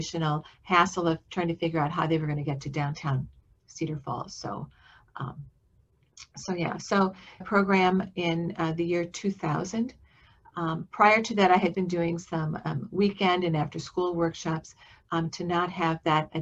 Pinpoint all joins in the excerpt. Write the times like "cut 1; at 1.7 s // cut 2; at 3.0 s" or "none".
cut 1; at 7.4 s // cut 2; at 11.7 s // cut 3; at 15.0 s